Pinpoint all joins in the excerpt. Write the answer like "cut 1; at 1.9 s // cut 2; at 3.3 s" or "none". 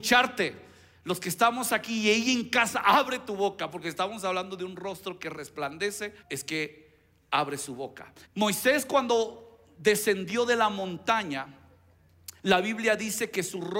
cut 1; at 6.2 s // cut 2; at 8.2 s